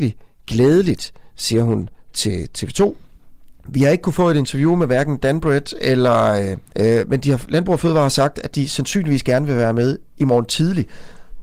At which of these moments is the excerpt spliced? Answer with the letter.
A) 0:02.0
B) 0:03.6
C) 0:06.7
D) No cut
C